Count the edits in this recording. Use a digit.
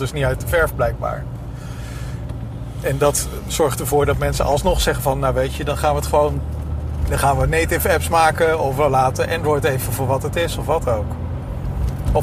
0